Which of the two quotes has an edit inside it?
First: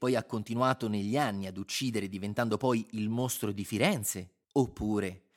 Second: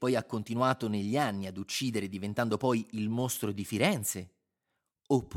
first; 1 cut; at 4.4 s

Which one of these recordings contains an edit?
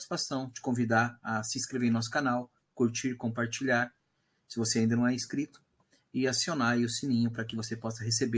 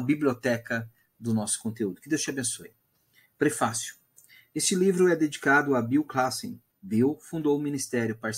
second; 1 cut; at 6.7 s

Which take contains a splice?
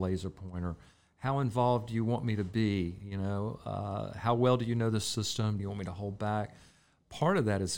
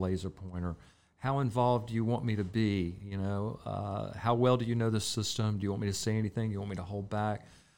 first; 1 cut; at 5.6 s

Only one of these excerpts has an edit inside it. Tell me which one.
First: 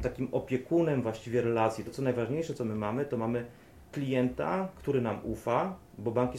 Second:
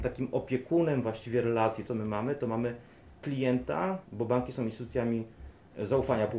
second; 2 cuts; at 1.9 s, 4.0 s

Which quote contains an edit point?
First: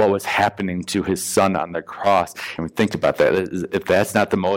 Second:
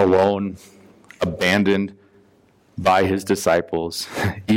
first; 1 cut; at 2.6 s

